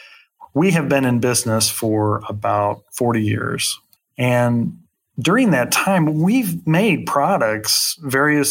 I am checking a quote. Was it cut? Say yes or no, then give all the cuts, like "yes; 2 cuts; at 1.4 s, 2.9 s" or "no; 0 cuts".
yes; 1 cut; at 4.0 s